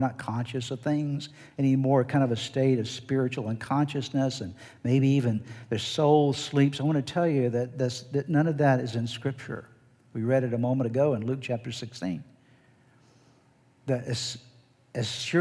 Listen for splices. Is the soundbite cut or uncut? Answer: uncut